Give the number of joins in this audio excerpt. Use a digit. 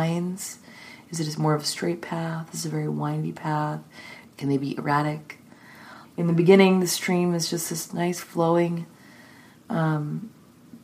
2